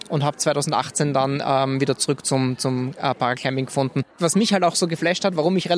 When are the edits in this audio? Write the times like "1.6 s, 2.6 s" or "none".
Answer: 4.1 s